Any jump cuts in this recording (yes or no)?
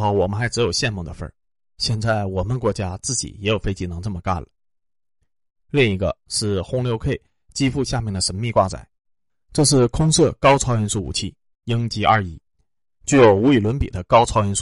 no